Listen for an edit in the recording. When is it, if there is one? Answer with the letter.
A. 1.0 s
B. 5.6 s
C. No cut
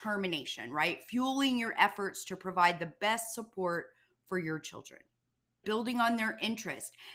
B